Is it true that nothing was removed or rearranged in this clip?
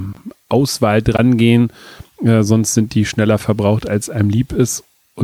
yes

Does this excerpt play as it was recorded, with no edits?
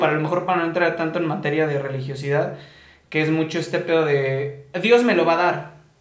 yes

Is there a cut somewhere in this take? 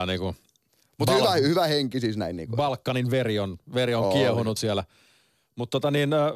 no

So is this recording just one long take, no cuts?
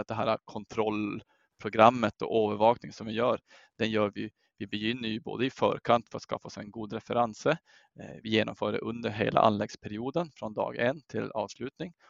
yes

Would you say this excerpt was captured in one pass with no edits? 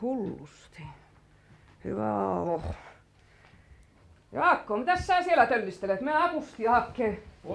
yes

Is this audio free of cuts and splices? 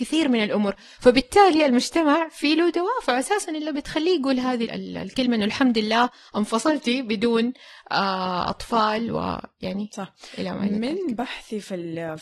no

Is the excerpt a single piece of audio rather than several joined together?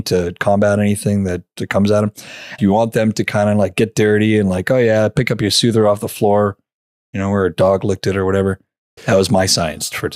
no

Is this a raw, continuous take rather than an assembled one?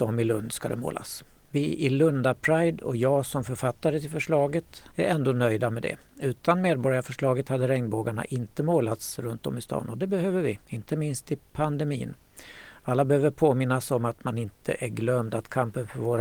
no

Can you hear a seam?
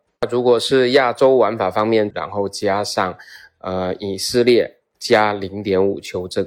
yes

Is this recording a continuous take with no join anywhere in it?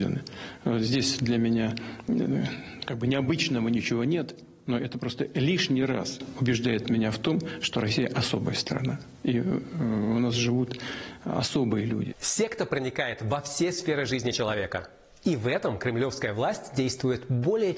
yes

